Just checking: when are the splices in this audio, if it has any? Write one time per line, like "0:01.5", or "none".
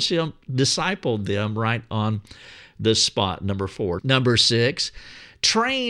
0:04.0